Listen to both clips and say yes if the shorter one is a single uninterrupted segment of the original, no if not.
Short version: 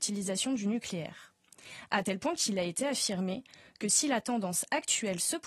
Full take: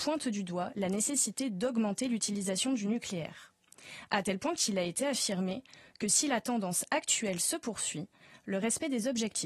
yes